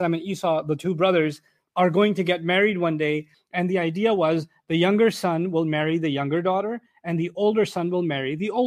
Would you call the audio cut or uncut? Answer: cut